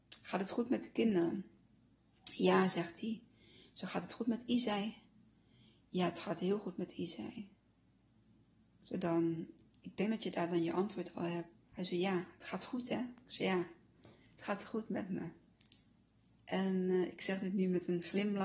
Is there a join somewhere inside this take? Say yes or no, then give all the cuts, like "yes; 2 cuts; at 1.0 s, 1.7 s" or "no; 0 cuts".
no; 0 cuts